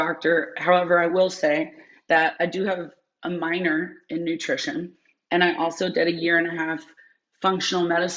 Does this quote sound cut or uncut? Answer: uncut